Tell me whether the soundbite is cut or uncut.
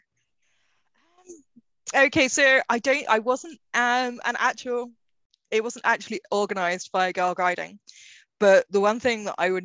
uncut